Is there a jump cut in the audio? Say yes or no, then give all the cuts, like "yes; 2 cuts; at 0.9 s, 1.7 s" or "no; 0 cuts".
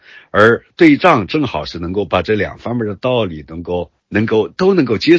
yes; 1 cut; at 4.0 s